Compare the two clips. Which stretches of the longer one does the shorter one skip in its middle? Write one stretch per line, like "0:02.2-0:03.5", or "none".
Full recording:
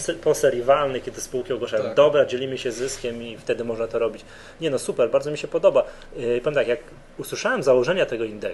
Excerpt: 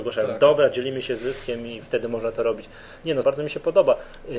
0:04.8-0:05.1

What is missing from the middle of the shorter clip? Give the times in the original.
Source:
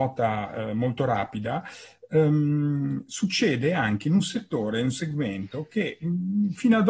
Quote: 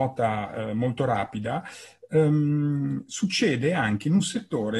none

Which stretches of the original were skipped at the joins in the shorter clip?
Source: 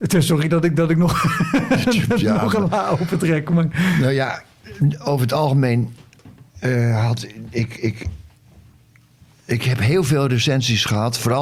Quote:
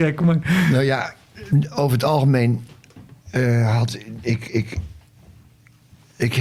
none

